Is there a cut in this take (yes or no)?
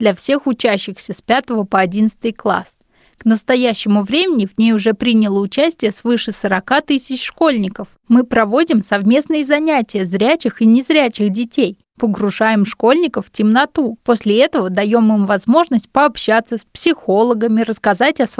yes